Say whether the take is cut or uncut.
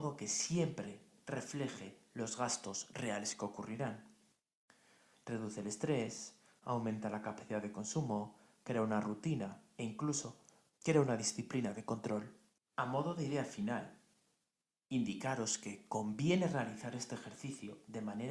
cut